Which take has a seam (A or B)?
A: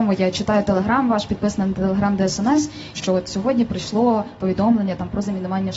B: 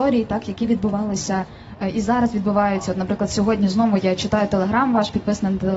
A